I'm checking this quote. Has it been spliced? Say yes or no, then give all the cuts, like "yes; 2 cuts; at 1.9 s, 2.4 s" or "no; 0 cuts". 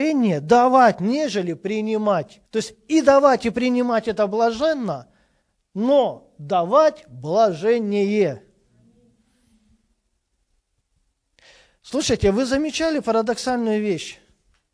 yes; 1 cut; at 2.5 s